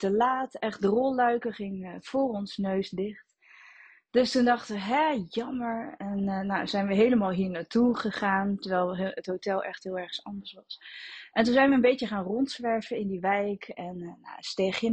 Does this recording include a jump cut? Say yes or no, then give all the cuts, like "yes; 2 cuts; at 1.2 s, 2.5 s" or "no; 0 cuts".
no; 0 cuts